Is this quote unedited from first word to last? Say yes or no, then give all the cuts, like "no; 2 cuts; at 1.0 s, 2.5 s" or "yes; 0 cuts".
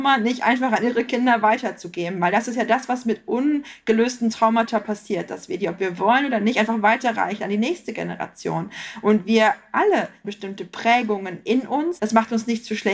no; 2 cuts; at 10.2 s, 12.0 s